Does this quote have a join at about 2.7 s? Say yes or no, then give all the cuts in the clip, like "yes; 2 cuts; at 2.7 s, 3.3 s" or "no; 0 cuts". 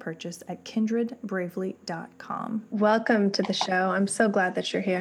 yes; 1 cut; at 2.7 s